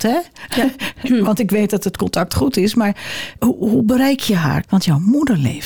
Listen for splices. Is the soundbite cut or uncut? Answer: cut